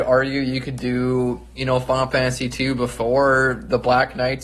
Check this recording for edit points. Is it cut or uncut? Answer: uncut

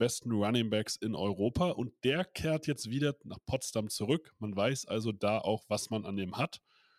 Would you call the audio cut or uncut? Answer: uncut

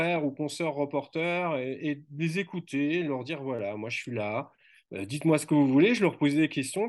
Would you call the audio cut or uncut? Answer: uncut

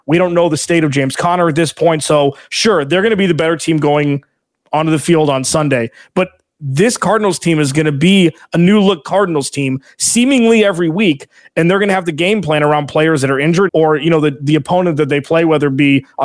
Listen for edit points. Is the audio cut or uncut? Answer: cut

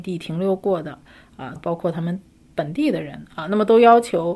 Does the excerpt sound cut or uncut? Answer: cut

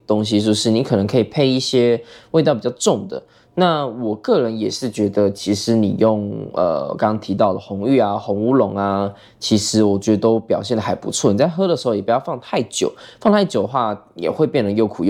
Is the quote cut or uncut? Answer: uncut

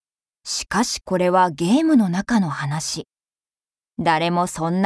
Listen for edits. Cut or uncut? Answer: uncut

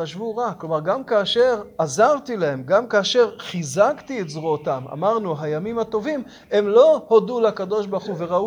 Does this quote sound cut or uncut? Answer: uncut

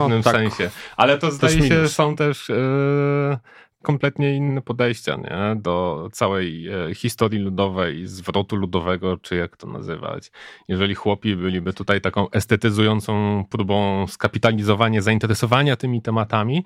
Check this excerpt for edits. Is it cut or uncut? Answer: uncut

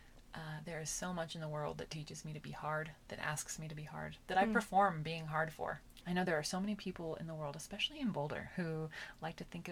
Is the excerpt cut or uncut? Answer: cut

